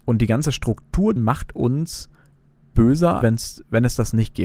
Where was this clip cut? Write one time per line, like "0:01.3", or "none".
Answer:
0:01.2
0:03.2